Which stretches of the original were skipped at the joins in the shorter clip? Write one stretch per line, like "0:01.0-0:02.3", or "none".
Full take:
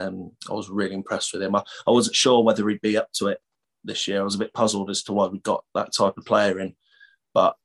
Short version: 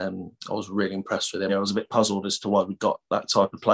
0:01.5-0:04.1